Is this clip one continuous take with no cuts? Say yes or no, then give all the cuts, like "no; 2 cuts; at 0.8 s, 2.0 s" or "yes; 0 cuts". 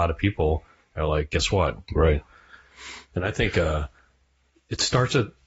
no; 1 cut; at 1.8 s